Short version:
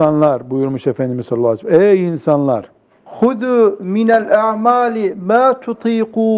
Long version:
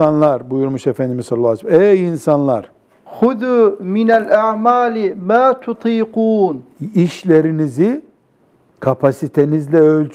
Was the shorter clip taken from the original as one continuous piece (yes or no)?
yes